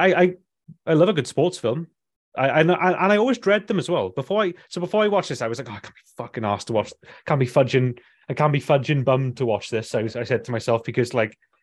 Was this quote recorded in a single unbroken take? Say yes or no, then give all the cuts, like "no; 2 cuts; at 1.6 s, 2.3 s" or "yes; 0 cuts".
yes; 0 cuts